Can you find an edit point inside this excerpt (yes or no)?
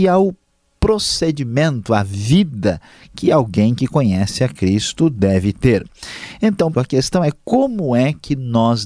yes